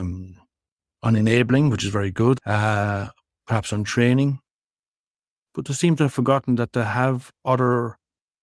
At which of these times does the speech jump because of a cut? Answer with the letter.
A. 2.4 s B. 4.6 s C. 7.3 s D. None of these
A